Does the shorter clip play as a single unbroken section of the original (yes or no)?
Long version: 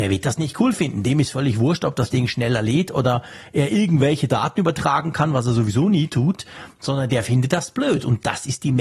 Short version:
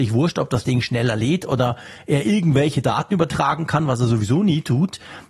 yes